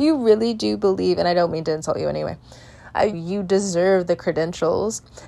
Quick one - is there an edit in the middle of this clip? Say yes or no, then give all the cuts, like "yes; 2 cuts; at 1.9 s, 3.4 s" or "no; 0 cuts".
yes; 1 cut; at 3.1 s